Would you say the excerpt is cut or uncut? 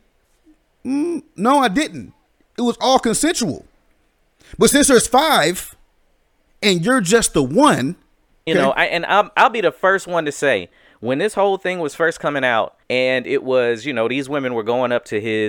cut